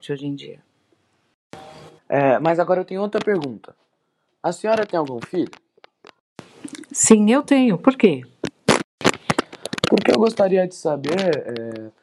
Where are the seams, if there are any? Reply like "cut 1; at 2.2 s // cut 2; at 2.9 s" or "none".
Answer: cut 1; at 2.0 s